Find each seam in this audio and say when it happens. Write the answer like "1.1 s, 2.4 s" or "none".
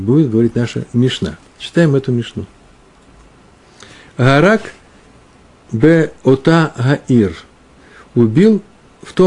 none